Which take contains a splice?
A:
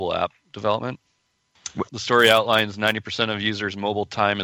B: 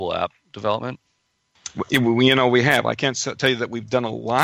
A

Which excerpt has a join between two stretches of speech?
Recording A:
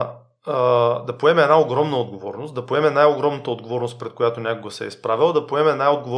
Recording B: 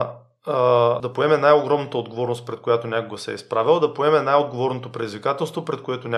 B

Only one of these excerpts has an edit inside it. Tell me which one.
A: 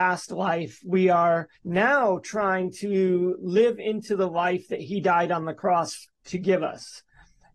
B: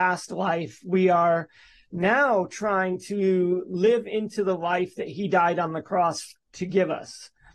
A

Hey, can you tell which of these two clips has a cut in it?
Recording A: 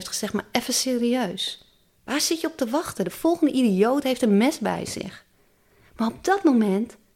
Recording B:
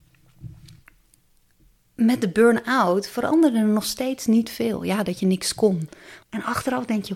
B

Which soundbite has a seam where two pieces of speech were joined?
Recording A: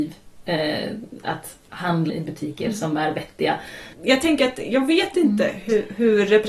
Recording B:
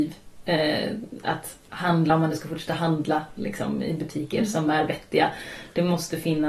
A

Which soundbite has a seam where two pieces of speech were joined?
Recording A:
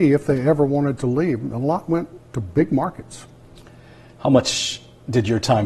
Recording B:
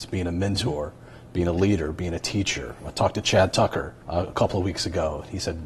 B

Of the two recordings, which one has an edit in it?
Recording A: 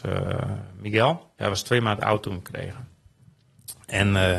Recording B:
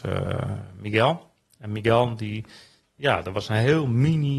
A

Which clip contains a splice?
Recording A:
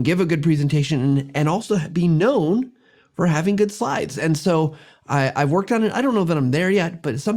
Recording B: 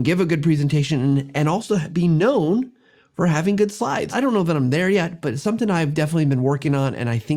B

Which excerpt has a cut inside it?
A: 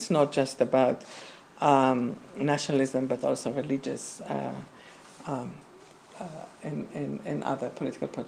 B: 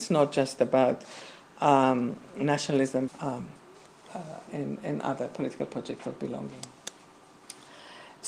B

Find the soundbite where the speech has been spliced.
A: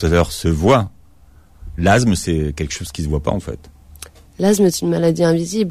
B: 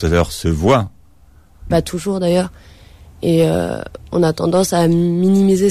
B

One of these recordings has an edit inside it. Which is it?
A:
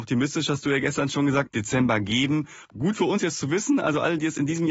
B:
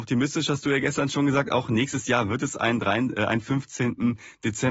A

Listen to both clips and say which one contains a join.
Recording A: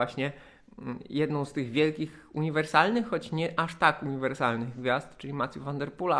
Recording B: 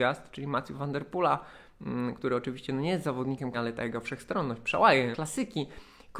B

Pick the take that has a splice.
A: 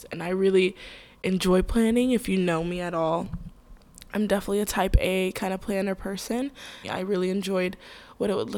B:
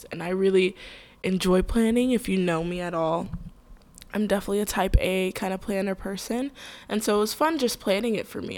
A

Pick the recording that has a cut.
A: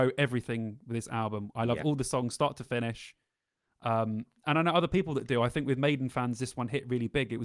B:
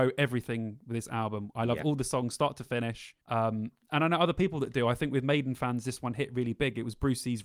B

